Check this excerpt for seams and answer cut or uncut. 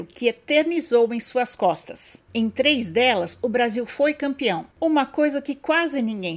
cut